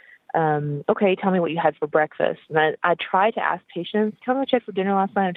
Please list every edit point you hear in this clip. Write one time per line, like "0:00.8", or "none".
0:04.2